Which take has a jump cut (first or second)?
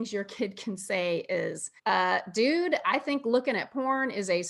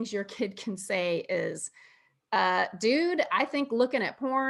first